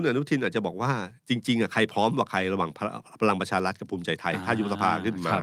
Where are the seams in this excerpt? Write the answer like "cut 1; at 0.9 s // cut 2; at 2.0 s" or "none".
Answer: cut 1; at 1.2 s